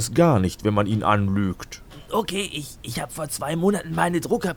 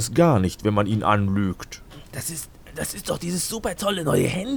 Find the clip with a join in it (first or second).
second